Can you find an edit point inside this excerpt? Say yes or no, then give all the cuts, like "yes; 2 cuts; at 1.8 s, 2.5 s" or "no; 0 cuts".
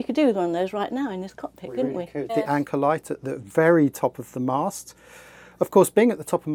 yes; 1 cut; at 2.3 s